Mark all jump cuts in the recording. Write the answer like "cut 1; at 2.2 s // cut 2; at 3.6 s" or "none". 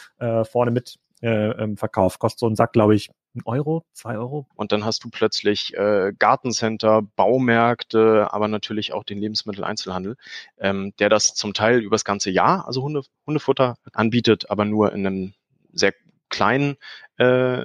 cut 1; at 4.5 s // cut 2; at 13.9 s